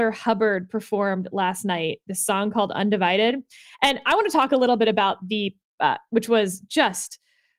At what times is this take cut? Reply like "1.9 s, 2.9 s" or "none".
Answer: 6.1 s